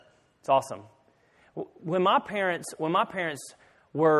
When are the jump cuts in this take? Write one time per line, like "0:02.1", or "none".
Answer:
none